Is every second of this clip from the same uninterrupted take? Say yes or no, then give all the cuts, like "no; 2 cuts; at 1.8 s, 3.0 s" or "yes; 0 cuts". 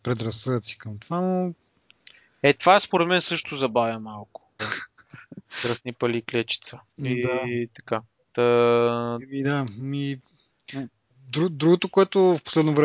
no; 1 cut; at 4.6 s